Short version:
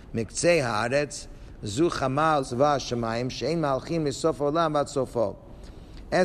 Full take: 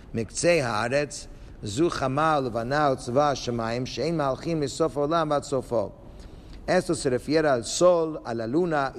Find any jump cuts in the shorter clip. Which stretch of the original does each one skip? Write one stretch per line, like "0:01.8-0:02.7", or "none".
0:02.4-0:03.0